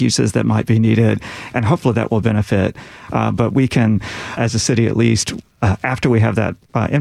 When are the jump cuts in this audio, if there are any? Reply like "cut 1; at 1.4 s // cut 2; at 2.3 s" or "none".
cut 1; at 1.5 s // cut 2; at 3.1 s // cut 3; at 4.4 s